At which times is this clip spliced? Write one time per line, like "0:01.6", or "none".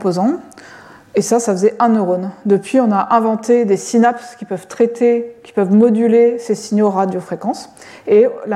none